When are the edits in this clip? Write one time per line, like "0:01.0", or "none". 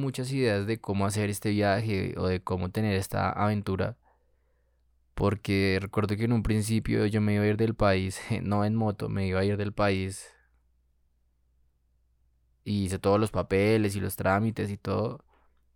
none